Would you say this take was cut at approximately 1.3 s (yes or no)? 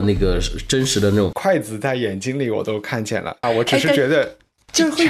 yes